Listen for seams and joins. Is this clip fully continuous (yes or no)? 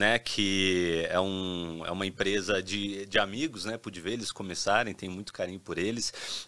yes